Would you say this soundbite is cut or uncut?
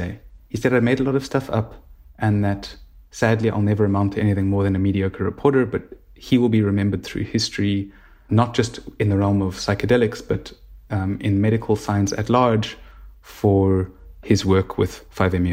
cut